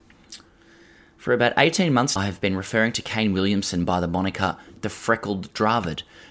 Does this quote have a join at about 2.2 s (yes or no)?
yes